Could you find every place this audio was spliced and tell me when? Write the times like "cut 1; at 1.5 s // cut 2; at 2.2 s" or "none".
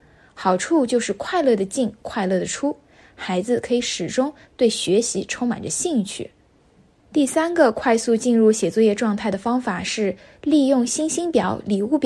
none